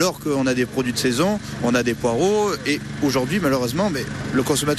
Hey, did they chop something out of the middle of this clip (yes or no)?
yes